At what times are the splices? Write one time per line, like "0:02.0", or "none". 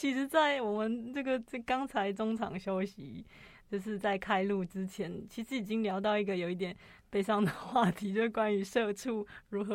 none